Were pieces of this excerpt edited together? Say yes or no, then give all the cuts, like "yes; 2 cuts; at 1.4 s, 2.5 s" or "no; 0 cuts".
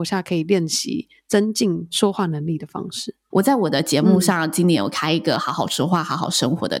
yes; 1 cut; at 3.3 s